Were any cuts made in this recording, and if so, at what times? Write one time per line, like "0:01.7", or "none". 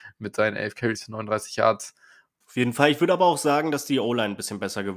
0:02.4